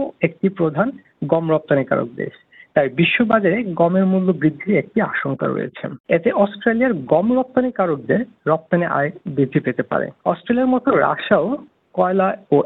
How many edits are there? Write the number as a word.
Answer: two